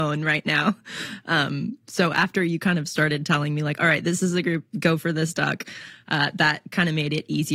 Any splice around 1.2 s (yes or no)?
no